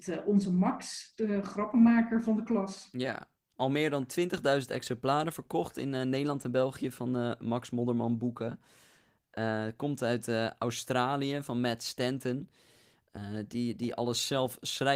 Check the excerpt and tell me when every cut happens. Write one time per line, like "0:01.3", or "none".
none